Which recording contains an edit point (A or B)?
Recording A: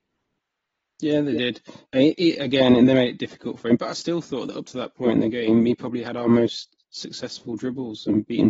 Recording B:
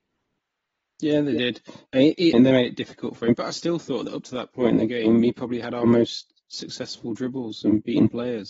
B